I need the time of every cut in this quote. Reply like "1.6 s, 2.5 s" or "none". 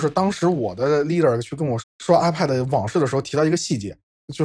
1.8 s